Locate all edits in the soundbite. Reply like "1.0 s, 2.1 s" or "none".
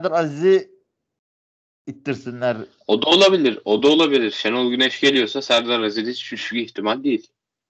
none

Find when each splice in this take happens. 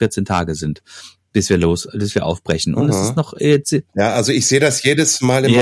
3.9 s

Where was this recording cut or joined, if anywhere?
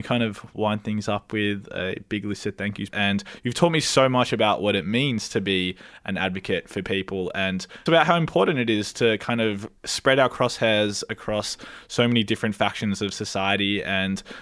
2.9 s, 7.9 s, 9.8 s

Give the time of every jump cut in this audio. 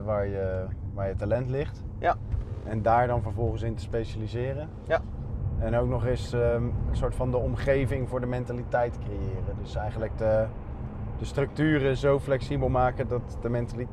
none

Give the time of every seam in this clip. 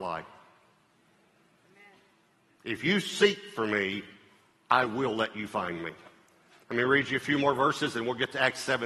none

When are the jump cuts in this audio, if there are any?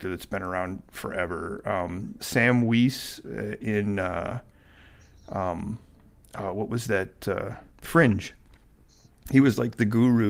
2.2 s, 7.7 s

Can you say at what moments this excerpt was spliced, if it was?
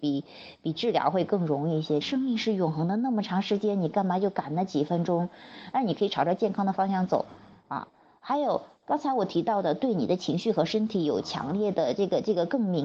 2.0 s, 5.7 s

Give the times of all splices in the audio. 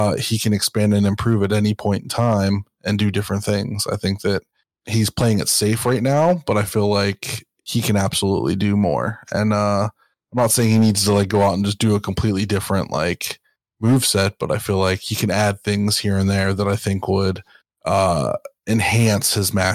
none

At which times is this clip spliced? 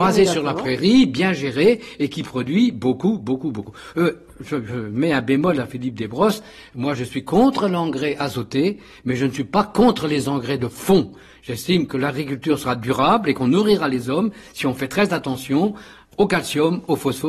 none

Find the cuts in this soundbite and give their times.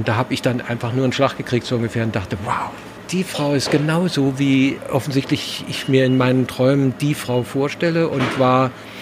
none

